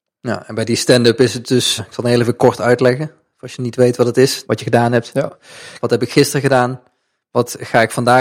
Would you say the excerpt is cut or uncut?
cut